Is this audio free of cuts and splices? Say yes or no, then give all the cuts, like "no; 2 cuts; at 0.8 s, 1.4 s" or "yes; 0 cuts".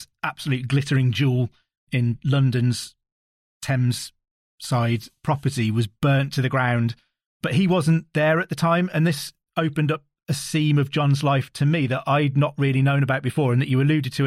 yes; 0 cuts